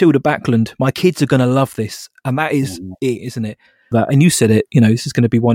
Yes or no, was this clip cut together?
yes